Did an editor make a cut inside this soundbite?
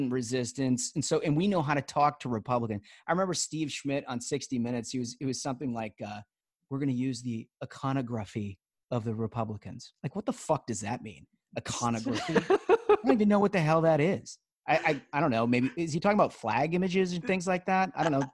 no; 0 cuts

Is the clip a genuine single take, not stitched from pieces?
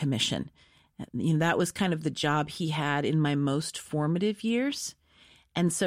yes; 0 cuts

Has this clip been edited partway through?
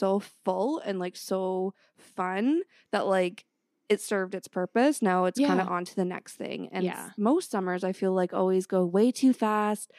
no; 0 cuts

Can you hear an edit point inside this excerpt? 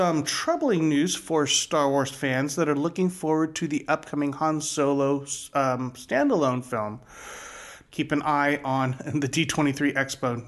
yes; 1 cut; at 7.9 s

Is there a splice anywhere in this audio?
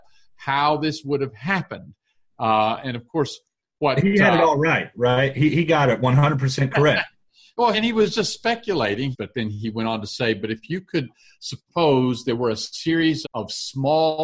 yes; 3 cuts; at 7.7 s, 9.1 s, 13.2 s

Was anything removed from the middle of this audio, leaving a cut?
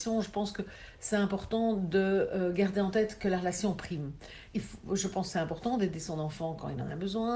yes; 1 cut; at 4.5 s

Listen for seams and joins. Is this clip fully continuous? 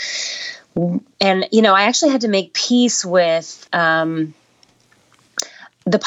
no; 1 cut; at 3.7 s

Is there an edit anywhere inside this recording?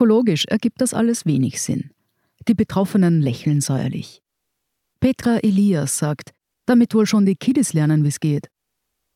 yes; 1 cut; at 6.5 s

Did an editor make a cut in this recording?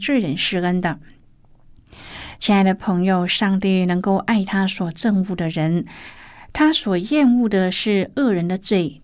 no; 0 cuts

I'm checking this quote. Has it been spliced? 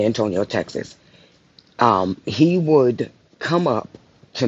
no; 0 cuts

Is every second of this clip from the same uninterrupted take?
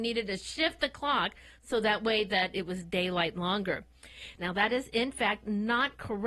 no; 1 cut; at 4.4 s

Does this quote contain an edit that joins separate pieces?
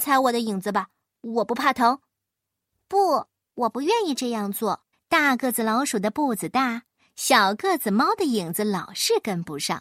yes; 1 cut; at 4.9 s

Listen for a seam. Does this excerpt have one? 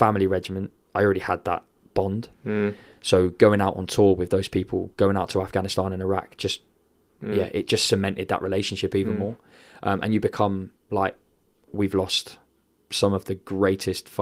no; 0 cuts

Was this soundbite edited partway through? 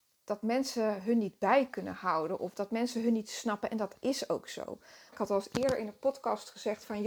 yes; 1 cut; at 5.1 s

